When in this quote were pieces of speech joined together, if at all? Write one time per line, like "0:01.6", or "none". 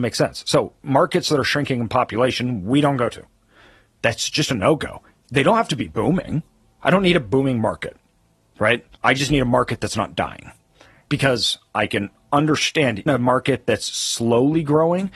0:08.9
0:11.1
0:13.1